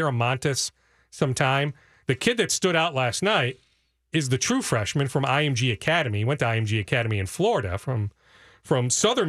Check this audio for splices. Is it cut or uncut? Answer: uncut